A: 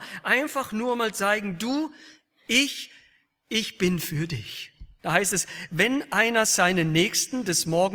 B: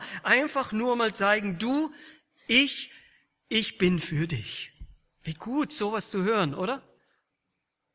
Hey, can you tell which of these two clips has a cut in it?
A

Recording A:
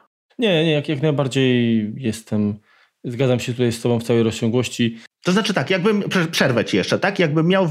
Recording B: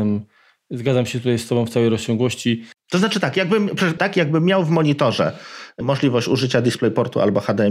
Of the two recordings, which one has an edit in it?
B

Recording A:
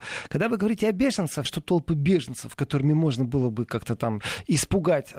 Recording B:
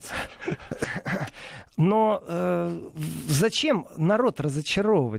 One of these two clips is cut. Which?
A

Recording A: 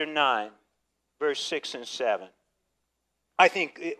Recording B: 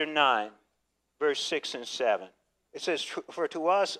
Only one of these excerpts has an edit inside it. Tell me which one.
B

